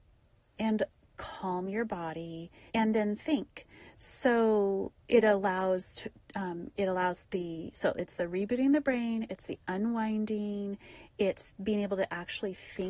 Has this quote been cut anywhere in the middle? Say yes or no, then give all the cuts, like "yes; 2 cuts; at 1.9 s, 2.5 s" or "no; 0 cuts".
yes; 1 cut; at 2.7 s